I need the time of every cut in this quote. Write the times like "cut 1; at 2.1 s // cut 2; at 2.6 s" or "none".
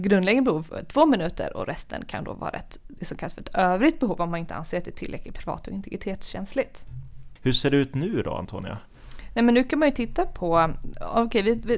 cut 1; at 7.4 s